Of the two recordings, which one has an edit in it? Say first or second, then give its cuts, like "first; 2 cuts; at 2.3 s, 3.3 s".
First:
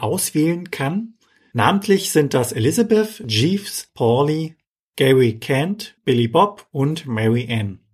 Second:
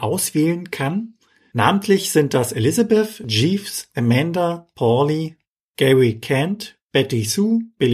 first; 2 cuts; at 3.9 s, 6.0 s